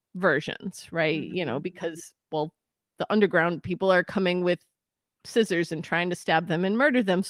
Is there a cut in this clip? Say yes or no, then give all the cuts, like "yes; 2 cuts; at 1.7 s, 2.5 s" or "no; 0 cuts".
no; 0 cuts